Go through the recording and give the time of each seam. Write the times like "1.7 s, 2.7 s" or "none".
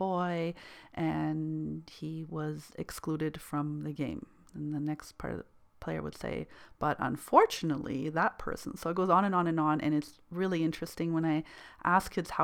4.4 s